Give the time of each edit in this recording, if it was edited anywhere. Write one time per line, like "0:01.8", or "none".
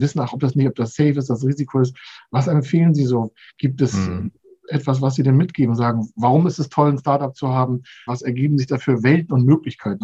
0:08.1